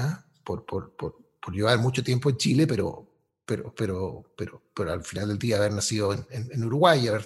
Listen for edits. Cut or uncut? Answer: uncut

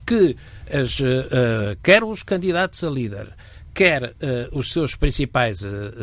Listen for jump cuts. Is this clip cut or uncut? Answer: uncut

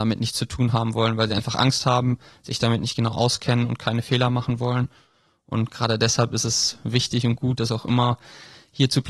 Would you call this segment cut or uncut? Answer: uncut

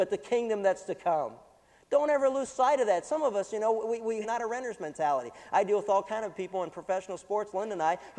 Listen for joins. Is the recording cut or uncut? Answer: cut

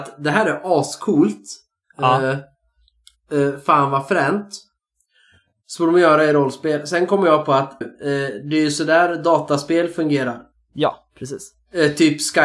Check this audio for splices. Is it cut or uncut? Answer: cut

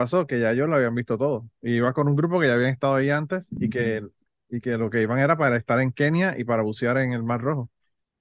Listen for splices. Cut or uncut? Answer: uncut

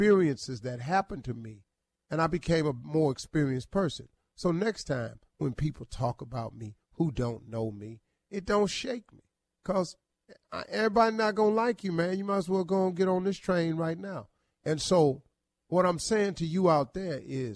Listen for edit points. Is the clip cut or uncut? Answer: uncut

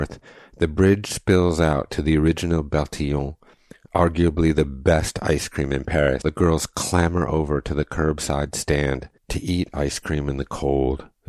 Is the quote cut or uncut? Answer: cut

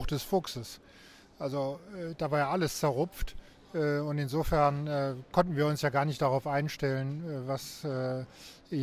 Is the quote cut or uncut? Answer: uncut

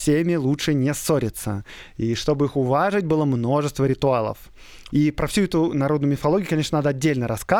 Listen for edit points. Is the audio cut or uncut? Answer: cut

